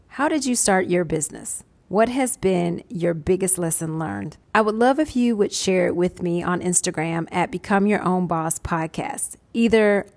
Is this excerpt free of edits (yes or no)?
no